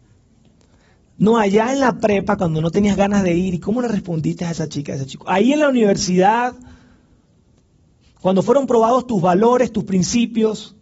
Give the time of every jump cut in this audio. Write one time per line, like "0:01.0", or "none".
none